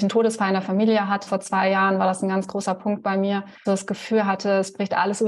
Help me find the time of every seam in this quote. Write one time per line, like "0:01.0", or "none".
0:01.3
0:03.6